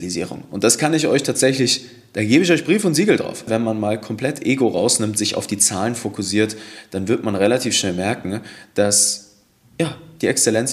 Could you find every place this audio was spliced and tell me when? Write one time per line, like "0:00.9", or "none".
0:03.5

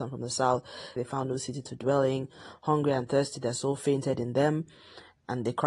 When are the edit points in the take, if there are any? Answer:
0:01.0

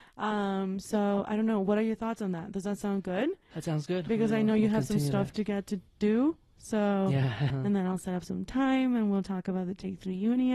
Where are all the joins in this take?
0:07.5

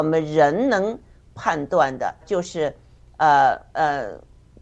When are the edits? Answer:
0:02.2

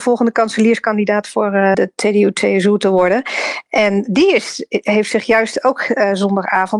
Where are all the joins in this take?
0:01.7

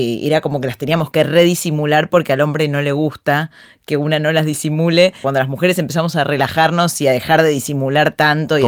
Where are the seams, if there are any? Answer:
0:05.2

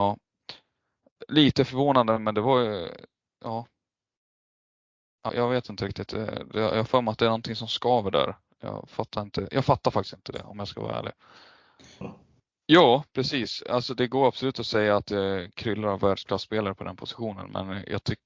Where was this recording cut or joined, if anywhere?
0:05.3
0:12.0

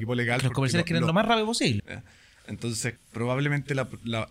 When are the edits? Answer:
0:01.8
0:03.0

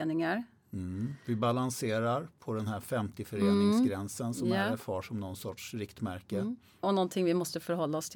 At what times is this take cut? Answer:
0:06.8

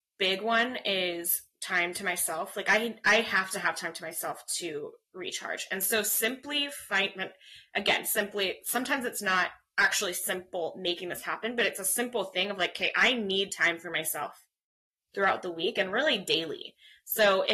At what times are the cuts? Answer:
none

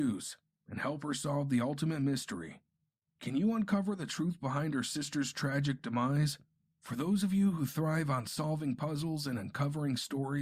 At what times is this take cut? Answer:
0:06.7

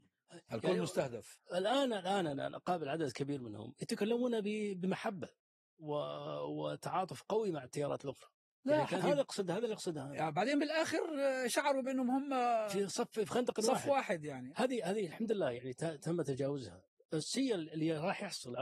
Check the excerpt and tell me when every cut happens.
0:09.0

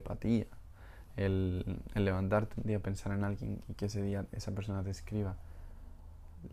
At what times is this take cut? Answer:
none

